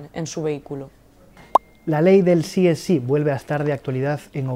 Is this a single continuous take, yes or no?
yes